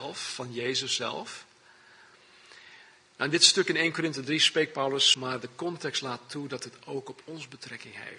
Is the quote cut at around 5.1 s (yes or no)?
yes